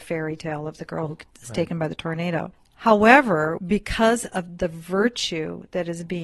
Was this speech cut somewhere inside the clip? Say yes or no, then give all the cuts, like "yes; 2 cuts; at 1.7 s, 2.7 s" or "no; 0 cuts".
yes; 1 cut; at 3.6 s